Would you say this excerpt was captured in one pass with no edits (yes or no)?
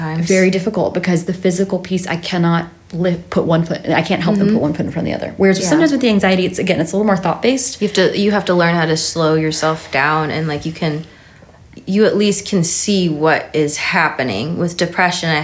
yes